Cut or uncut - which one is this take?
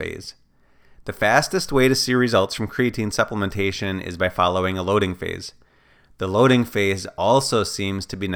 uncut